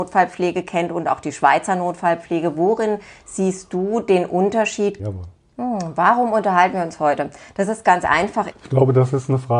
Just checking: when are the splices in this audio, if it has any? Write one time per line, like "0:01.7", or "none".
0:05.0
0:08.5